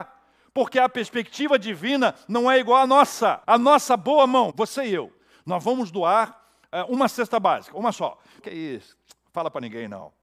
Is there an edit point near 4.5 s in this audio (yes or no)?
yes